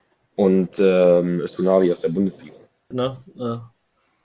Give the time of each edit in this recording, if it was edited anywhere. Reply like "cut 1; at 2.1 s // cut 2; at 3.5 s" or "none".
cut 1; at 2.9 s